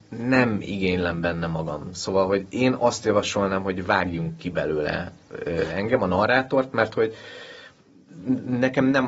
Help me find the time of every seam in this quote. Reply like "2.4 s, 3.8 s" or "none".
none